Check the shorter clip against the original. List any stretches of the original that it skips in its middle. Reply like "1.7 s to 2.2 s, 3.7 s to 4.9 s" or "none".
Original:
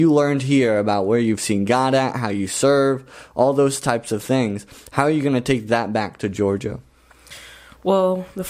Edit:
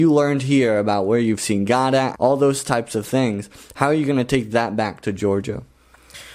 2.1 s to 3.3 s